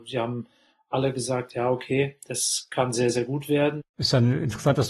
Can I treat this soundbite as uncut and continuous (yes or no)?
no